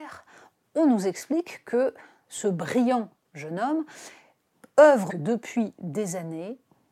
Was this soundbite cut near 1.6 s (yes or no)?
no